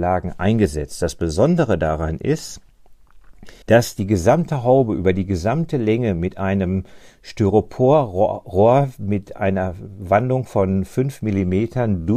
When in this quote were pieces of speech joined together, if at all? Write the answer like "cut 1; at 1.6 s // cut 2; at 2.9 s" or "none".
cut 1; at 3.6 s